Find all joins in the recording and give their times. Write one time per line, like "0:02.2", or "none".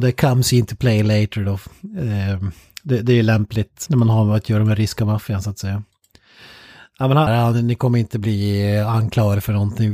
0:03.9
0:07.3